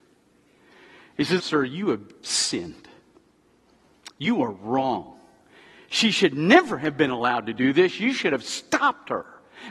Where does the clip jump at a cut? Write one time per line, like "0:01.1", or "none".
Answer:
0:01.4